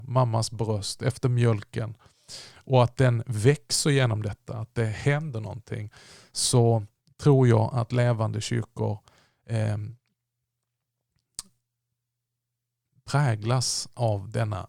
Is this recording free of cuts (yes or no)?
yes